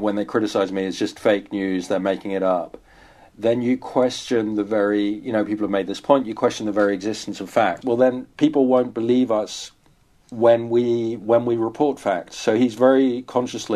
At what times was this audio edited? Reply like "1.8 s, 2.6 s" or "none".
7.8 s

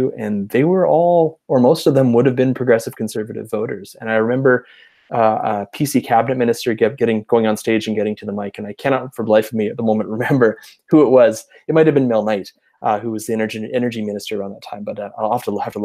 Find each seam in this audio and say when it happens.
none

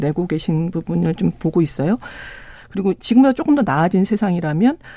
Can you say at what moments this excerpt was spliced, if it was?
2.5 s

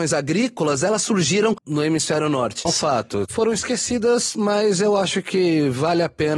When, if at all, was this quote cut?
2.7 s

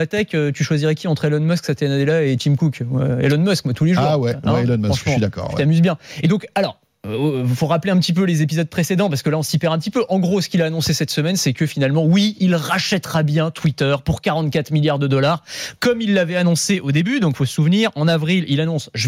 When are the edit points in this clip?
none

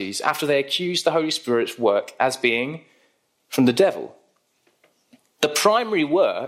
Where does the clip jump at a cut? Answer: none

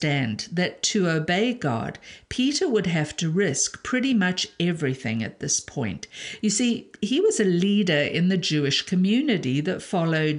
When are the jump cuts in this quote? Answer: none

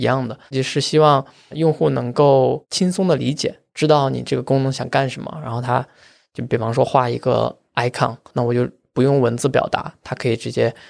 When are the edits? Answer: 8.3 s

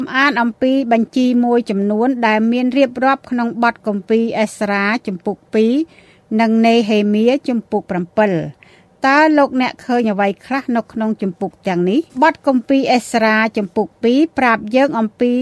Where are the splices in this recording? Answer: 12.1 s

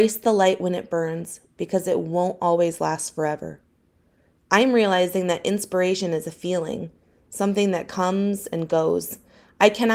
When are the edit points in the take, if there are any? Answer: none

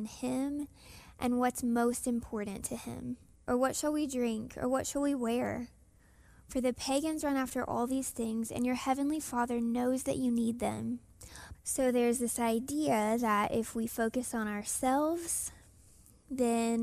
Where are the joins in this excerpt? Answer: 3.3 s, 11.5 s

